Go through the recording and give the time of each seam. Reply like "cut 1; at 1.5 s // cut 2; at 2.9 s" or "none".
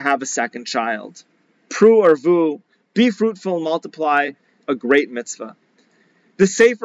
cut 1; at 1.6 s // cut 2; at 4.6 s